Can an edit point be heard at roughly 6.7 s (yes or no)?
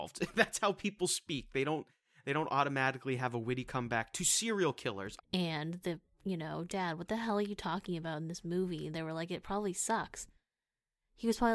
yes